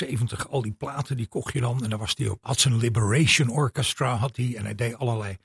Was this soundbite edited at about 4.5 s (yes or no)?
no